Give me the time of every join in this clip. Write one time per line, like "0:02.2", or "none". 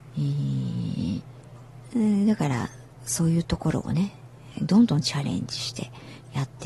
0:04.5